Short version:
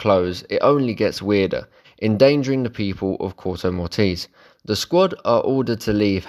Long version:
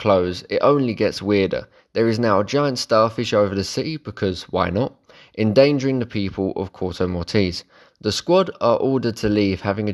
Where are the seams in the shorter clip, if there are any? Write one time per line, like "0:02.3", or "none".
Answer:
0:01.8